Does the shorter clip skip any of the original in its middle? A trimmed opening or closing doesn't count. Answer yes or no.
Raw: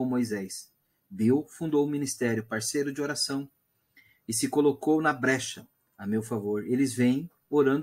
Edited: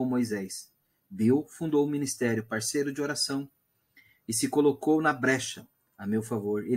no